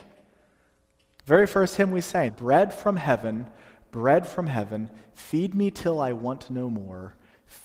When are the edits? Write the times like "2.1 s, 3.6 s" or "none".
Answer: 2.3 s